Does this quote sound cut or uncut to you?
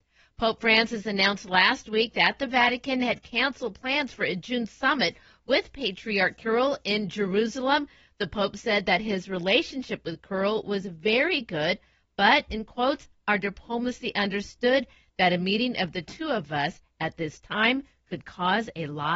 uncut